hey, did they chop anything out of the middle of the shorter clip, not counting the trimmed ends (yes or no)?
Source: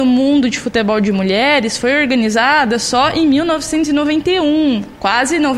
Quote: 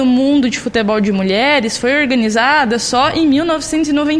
no